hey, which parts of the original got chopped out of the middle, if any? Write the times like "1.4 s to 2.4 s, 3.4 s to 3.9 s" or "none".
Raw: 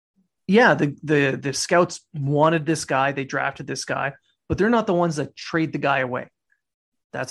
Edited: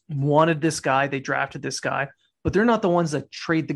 none